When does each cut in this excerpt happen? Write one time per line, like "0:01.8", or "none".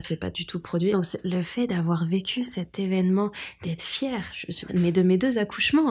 0:00.9
0:04.7